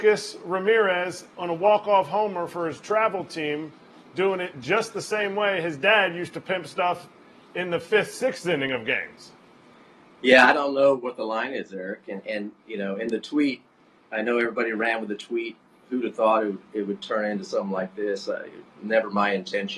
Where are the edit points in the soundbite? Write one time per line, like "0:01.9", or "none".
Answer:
none